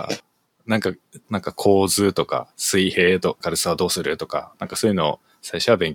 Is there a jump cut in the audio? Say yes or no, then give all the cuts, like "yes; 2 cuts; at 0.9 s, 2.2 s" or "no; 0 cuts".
yes; 2 cuts; at 1.2 s, 3.4 s